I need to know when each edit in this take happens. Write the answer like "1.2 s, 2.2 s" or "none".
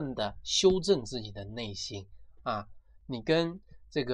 3.0 s